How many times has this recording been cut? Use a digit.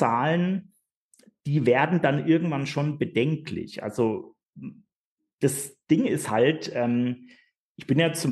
0